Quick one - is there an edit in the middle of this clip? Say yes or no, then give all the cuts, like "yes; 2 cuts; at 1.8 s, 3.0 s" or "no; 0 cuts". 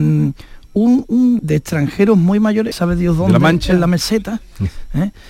yes; 2 cuts; at 1.4 s, 2.7 s